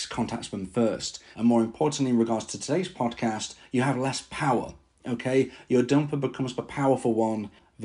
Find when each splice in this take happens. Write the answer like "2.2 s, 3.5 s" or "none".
1.3 s